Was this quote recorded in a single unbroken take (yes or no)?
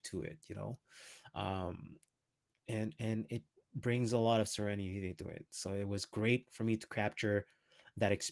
yes